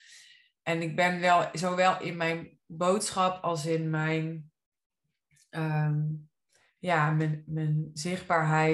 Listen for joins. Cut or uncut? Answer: uncut